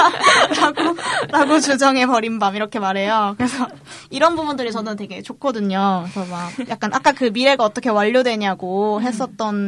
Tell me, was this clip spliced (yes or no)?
no